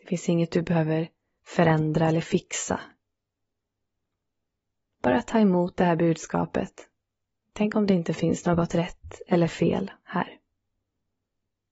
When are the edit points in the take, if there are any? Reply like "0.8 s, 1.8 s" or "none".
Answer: 7.4 s